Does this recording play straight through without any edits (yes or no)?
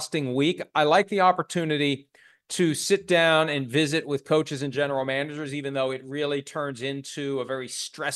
yes